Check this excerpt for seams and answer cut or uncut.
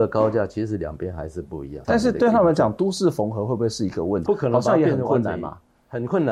cut